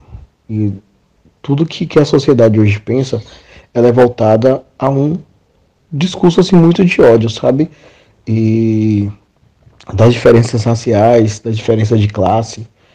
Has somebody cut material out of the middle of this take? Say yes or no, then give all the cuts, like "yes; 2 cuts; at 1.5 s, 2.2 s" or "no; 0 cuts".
no; 0 cuts